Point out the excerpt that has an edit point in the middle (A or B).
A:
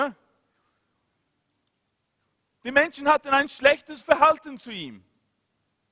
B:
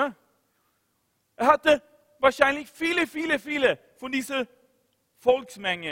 B